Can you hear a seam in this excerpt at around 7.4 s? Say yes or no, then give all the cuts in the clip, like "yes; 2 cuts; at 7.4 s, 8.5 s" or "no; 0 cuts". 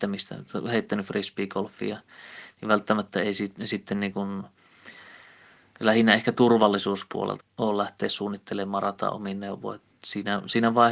yes; 1 cut; at 7.4 s